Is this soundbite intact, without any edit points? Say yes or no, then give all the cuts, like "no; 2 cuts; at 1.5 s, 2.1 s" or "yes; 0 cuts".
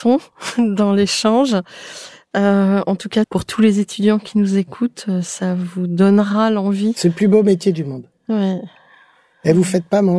no; 1 cut; at 3.2 s